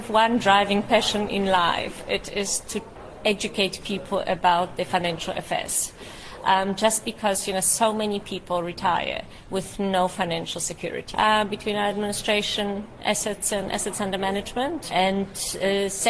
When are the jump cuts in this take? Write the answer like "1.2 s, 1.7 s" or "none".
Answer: 11.1 s, 14.9 s